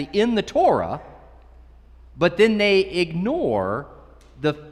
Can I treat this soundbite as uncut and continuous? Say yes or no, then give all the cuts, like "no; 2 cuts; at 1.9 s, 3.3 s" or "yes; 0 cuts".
yes; 0 cuts